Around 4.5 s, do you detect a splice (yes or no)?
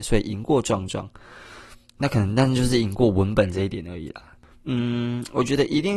yes